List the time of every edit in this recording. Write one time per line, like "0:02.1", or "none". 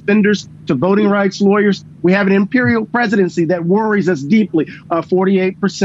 0:02.0
0:04.8